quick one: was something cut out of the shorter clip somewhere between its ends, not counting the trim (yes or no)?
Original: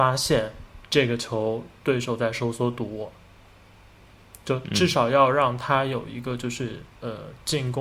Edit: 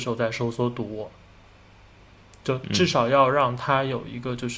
no